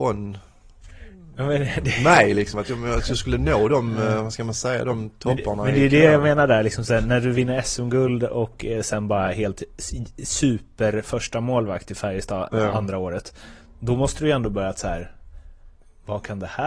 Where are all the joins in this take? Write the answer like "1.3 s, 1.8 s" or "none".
none